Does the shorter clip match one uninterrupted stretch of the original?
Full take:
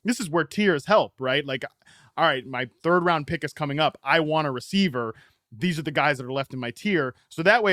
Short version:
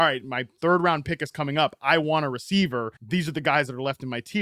no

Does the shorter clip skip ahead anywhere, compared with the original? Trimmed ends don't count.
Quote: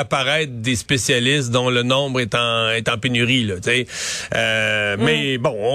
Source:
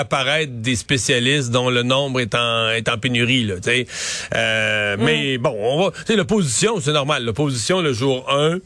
no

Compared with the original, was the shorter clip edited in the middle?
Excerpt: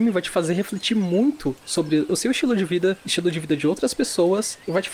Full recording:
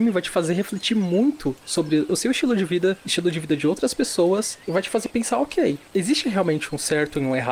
no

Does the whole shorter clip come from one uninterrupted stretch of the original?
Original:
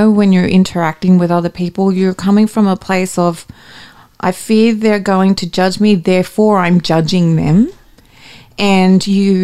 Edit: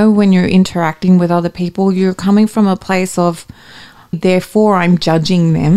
no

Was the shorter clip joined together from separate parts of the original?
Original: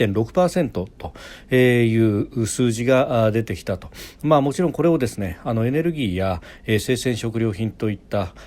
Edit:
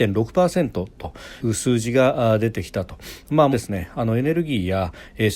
yes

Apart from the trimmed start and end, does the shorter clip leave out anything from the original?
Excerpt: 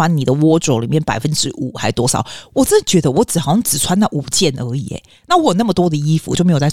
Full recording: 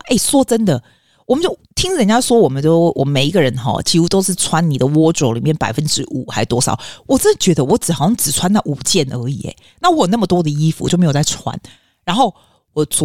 no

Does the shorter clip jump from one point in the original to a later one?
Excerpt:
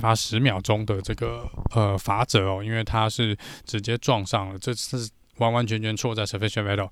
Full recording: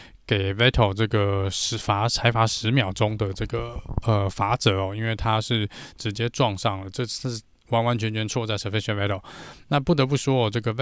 no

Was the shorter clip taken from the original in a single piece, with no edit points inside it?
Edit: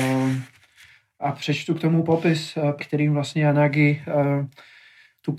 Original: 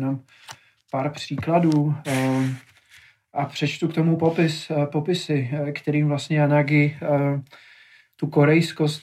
no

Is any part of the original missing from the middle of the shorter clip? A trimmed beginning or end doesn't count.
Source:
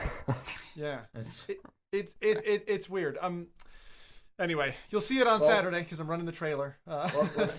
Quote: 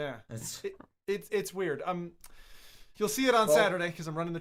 yes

